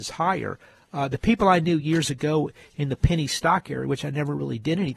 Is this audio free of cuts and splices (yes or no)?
yes